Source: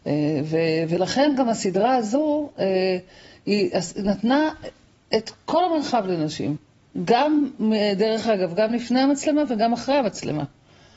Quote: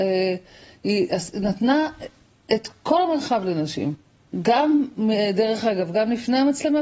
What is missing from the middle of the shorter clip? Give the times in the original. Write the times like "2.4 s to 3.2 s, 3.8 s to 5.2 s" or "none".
none